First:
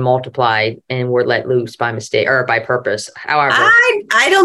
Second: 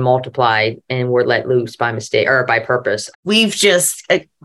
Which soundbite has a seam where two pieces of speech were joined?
second; 1 cut; at 3.1 s

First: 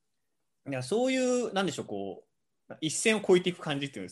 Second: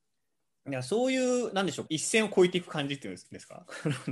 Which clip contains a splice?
second; 1 cut; at 1.9 s

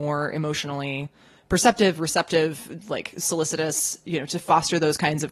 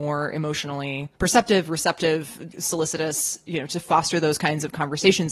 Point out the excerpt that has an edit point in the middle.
second; 2 cuts; at 1.2 s, 2.5 s

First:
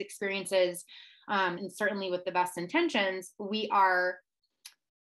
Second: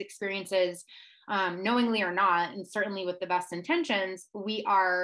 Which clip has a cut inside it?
first; 1 cut; at 1.6 s

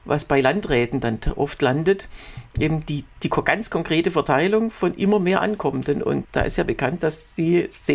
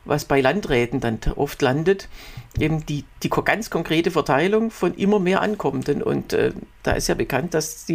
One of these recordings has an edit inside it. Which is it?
first; 1 cut; at 6.2 s

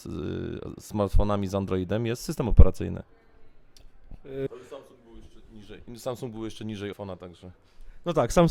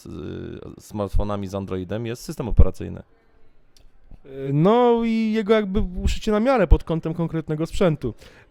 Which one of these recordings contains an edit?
first; 2 cuts; at 4.5 s, 6.9 s

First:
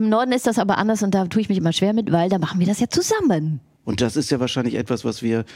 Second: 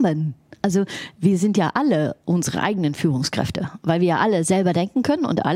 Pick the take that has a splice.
first; 1 cut; at 3.8 s

